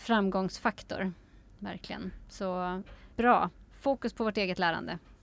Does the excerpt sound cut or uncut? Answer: cut